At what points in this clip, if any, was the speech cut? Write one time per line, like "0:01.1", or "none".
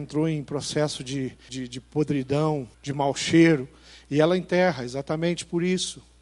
0:01.5
0:02.7